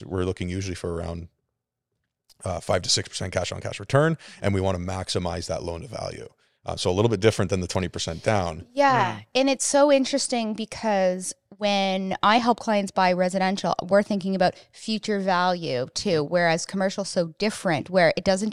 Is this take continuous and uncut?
yes; 0 cuts

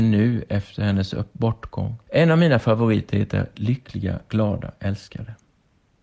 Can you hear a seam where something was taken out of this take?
yes; 1 cut; at 2.0 s

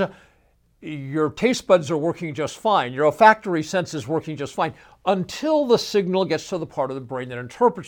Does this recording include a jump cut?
no; 0 cuts

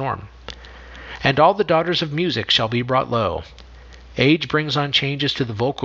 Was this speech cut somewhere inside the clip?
no; 0 cuts

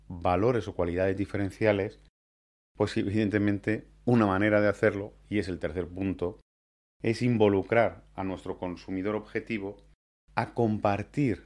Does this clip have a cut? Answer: no; 0 cuts

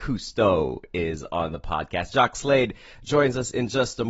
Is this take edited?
no; 0 cuts

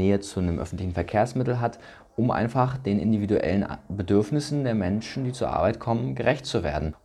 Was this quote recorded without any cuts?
yes; 0 cuts

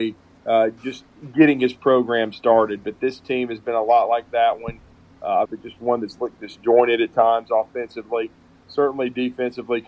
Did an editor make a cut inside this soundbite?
yes; 1 cut; at 5.5 s

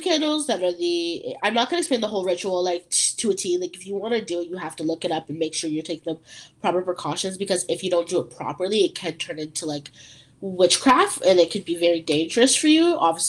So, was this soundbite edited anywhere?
no; 0 cuts

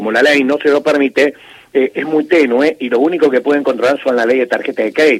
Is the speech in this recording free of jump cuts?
yes; 0 cuts

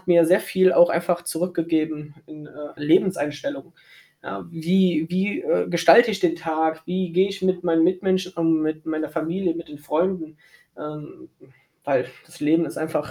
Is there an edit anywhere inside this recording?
yes; 1 cut; at 2.8 s

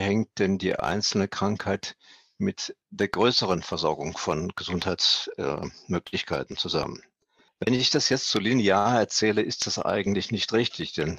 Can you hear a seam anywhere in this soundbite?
no; 0 cuts

